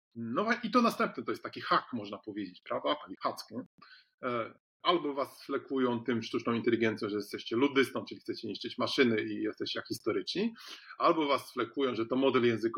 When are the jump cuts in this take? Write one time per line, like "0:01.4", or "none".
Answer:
0:03.1